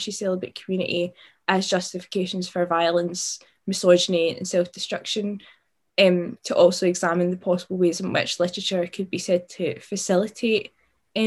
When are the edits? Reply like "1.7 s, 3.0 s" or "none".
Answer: none